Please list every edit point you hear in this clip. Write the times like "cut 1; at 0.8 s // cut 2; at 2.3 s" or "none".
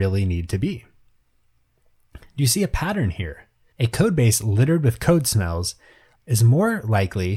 cut 1; at 3.7 s // cut 2; at 6.2 s